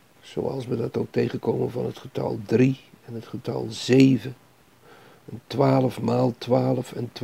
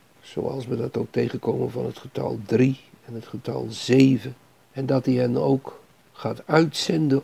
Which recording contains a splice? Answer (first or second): second